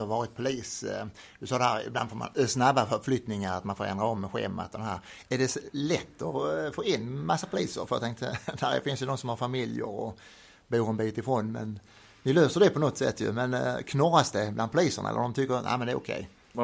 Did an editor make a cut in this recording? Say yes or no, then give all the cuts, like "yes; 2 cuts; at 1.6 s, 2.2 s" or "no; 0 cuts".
no; 0 cuts